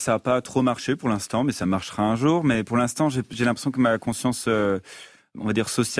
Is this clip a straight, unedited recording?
yes; 0 cuts

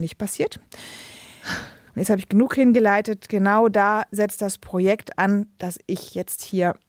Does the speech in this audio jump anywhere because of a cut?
yes; 1 cut; at 1.9 s

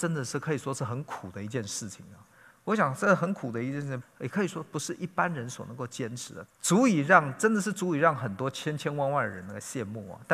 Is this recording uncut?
no; 2 cuts; at 4.0 s, 6.5 s

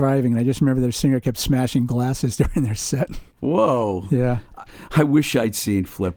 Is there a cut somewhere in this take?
yes; 2 cuts; at 3.3 s, 4.7 s

